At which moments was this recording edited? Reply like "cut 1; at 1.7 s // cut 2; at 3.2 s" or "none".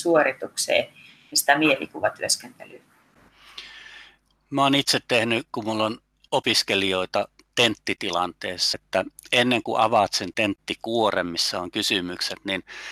cut 1; at 8.7 s

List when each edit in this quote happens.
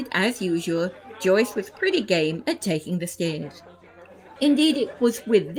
cut 1; at 4.4 s

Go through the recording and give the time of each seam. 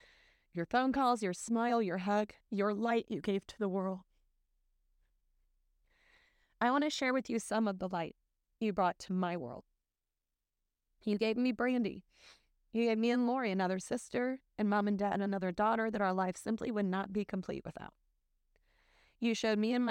cut 1; at 2.5 s

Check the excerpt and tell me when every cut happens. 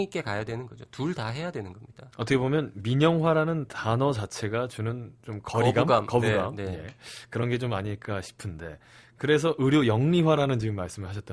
none

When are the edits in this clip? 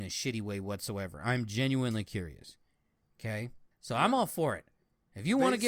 cut 1; at 3.7 s

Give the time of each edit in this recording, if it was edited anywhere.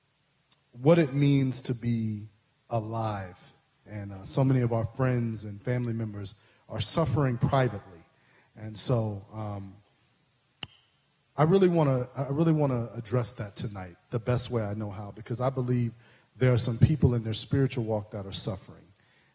cut 1; at 3.9 s

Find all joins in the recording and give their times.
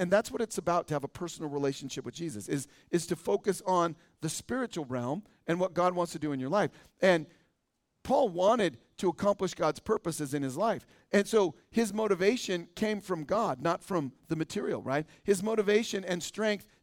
none

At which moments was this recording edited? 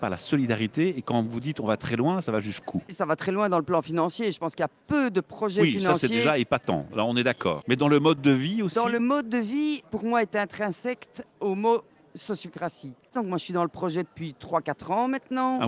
cut 1; at 9.8 s // cut 2; at 13.1 s

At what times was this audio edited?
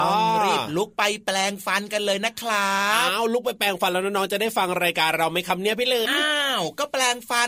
cut 1; at 6.1 s

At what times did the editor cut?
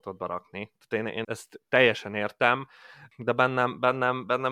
cut 1; at 1.2 s

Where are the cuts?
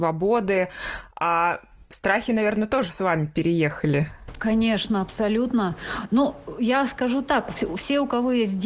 none

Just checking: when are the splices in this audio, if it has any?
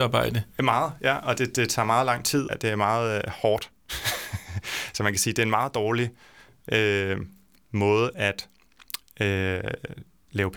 cut 1; at 2.5 s

